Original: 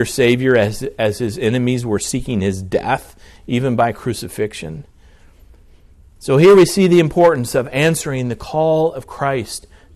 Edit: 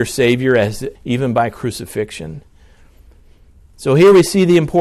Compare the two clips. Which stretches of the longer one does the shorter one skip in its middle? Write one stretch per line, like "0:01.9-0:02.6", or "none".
0:01.0-0:03.4